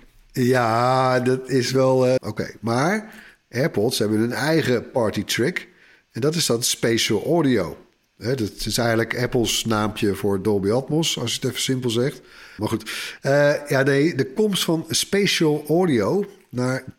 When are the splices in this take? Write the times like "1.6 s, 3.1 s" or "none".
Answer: 2.2 s, 12.6 s